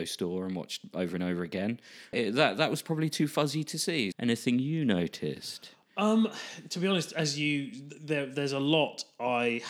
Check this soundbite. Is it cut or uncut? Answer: cut